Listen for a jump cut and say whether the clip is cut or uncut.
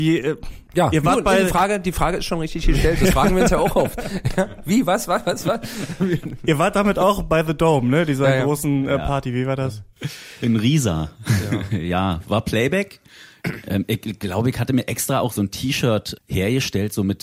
cut